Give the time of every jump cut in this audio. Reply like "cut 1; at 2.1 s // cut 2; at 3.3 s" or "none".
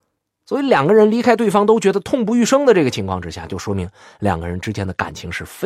none